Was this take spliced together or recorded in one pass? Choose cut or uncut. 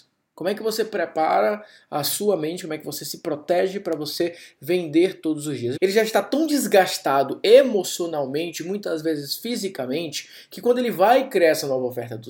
cut